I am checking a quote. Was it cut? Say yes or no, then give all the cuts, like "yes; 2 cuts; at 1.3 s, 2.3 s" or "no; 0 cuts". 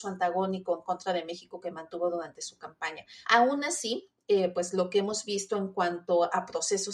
yes; 1 cut; at 3.2 s